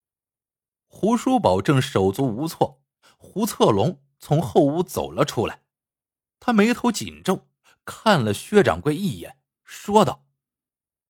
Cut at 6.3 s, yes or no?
no